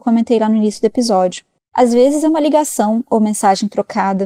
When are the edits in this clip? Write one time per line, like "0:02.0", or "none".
none